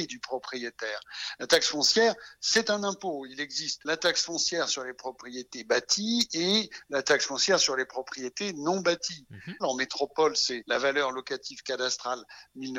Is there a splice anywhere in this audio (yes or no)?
yes